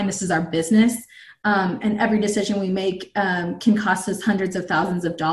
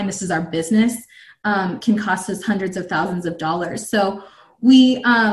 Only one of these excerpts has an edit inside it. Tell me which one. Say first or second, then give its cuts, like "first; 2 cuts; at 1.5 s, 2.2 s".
second; 1 cut; at 1.8 s